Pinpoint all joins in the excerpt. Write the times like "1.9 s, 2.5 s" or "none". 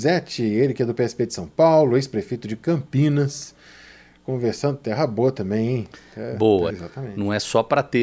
6.7 s